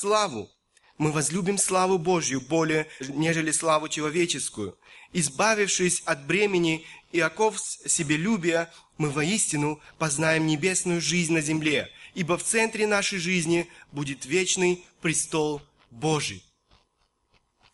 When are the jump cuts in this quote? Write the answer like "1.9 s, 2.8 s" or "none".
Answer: 3.0 s